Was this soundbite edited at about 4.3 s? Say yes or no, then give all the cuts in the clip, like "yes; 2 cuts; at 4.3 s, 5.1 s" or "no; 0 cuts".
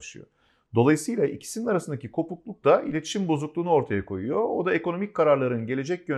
no; 0 cuts